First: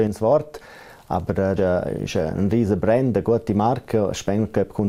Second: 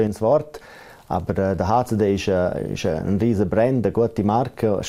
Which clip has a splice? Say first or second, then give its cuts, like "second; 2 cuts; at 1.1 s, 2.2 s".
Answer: first; 1 cut; at 1.6 s